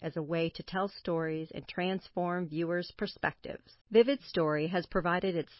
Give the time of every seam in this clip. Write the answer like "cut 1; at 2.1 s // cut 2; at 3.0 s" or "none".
cut 1; at 3.8 s